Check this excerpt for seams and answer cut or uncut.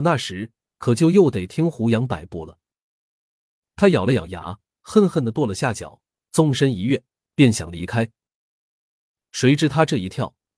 uncut